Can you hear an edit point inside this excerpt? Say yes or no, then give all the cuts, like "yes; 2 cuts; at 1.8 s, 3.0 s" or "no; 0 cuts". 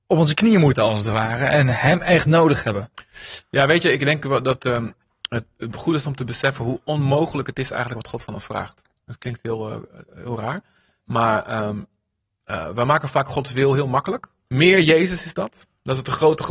yes; 1 cut; at 14.5 s